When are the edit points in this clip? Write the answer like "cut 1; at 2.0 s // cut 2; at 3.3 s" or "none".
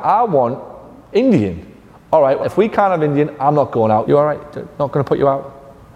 cut 1; at 2.4 s // cut 2; at 4.1 s

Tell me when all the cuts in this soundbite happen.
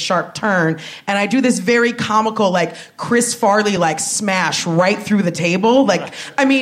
none

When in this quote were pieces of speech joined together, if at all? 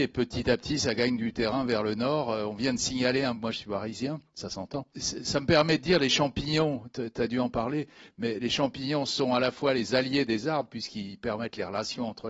cut 1; at 4.9 s

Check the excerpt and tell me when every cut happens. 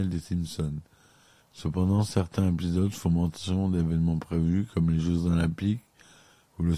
cut 1; at 1.4 s

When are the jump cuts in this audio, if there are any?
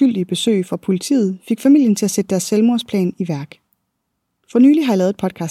cut 1; at 4.4 s

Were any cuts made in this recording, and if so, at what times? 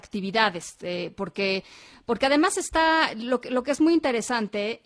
none

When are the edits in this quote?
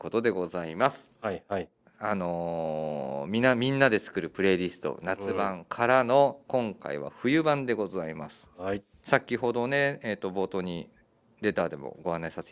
cut 1; at 1.1 s // cut 2; at 9.0 s

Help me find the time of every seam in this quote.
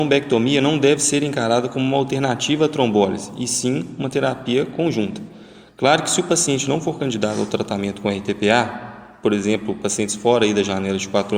none

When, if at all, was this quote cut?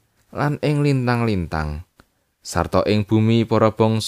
none

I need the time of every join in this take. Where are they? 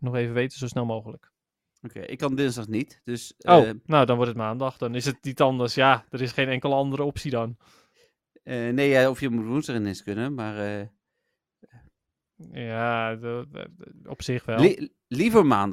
none

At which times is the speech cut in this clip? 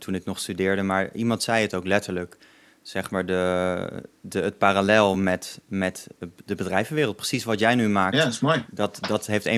none

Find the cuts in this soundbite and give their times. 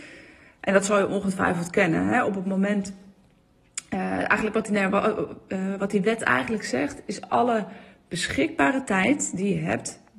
none

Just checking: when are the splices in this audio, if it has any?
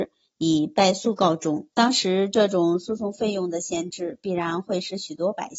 cut 1; at 1.7 s

